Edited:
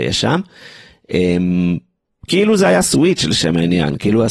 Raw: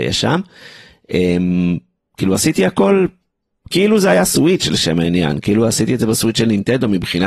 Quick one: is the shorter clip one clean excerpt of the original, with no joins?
no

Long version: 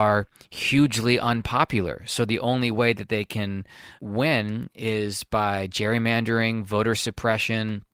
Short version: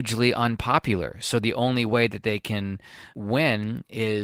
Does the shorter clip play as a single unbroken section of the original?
yes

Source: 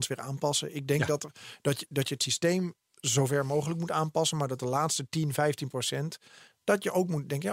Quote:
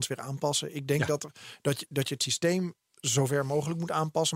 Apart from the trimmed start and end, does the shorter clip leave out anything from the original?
no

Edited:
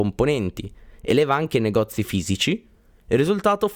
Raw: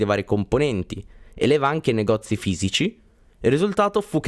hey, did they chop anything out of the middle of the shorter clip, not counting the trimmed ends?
no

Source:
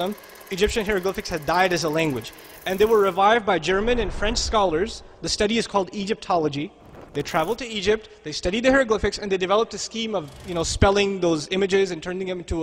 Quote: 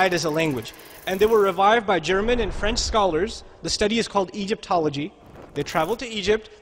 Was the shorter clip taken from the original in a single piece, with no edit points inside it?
yes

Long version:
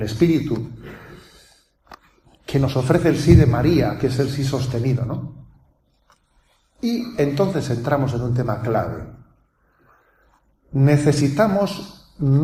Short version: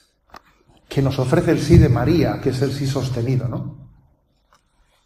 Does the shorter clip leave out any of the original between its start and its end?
no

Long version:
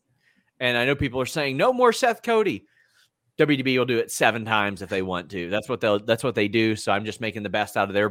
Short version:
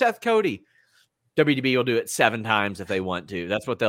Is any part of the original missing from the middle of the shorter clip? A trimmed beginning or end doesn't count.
no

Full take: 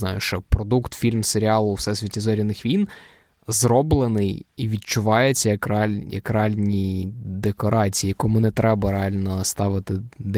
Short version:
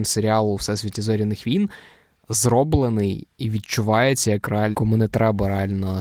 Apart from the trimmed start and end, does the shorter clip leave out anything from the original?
yes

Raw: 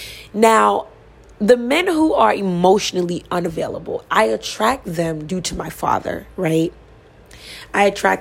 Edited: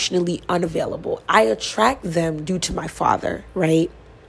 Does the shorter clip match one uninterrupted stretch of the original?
yes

